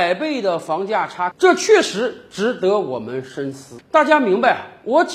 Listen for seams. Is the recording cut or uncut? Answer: cut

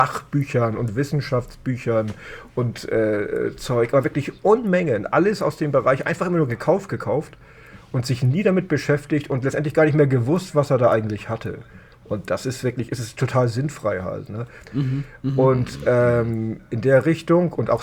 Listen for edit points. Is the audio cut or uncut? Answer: cut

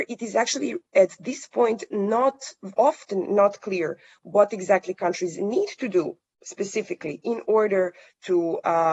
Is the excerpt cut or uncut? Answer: uncut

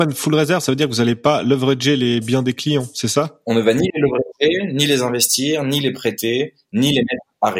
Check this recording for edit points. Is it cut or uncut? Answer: uncut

